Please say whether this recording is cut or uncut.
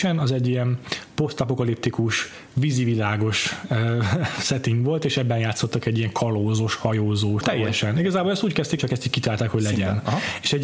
cut